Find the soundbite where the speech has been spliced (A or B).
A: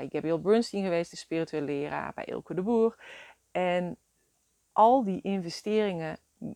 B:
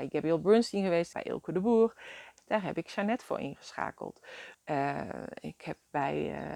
B